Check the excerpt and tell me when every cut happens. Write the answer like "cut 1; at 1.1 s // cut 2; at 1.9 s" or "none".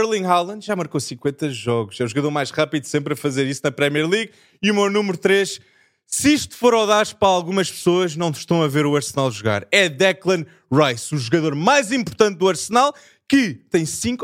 none